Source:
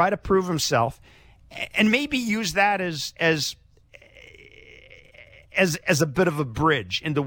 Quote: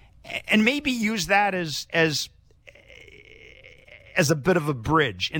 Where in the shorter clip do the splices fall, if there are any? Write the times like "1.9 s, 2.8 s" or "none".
4.1 s